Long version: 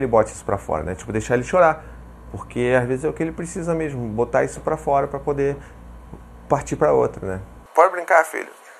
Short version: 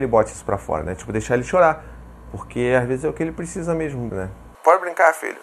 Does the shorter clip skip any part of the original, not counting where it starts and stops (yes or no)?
yes